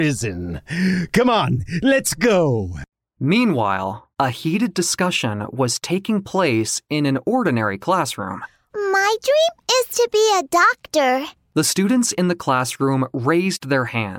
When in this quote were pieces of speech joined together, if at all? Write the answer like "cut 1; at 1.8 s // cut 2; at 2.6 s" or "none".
cut 1; at 4.1 s // cut 2; at 8.7 s